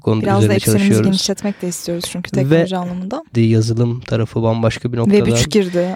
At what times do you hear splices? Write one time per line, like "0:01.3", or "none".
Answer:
0:03.3